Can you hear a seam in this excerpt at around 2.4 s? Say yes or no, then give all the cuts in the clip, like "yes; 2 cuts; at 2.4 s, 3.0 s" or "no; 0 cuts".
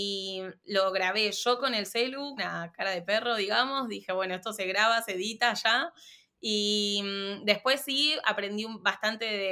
yes; 1 cut; at 2.4 s